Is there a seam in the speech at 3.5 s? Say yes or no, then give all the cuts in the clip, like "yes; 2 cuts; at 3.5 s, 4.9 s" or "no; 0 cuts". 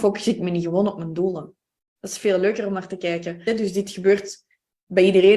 yes; 2 cuts; at 2.0 s, 3.5 s